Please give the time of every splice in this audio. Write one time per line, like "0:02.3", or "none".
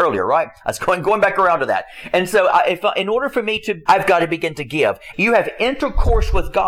0:03.9
0:05.1